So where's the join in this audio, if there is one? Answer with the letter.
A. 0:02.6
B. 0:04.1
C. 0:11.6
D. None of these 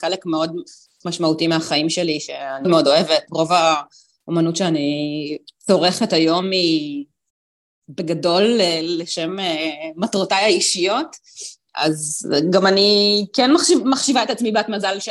A